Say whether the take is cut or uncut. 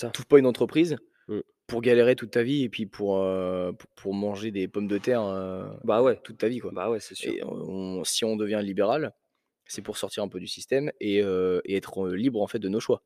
uncut